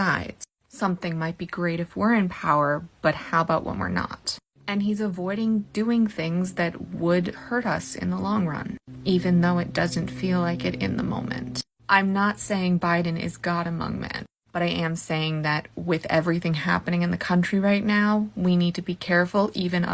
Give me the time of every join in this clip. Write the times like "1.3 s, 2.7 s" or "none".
none